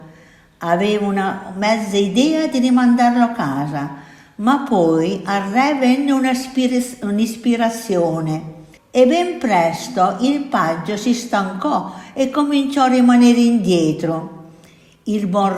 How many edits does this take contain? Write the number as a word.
one